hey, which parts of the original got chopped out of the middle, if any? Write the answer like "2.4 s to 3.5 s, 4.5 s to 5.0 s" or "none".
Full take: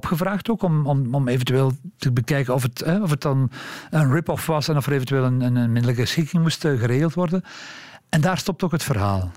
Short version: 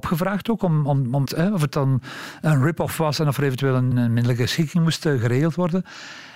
1.3 s to 2.7 s, 5.4 s to 5.5 s